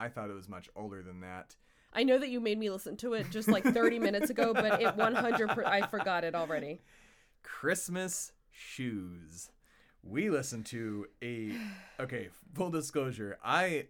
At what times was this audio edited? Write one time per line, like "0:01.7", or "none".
0:01.9